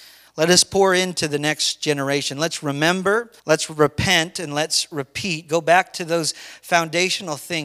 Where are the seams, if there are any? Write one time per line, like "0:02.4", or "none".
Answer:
0:03.4